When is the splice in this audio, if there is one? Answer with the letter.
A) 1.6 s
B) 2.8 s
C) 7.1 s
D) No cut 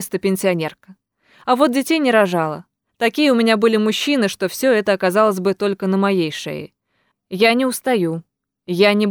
C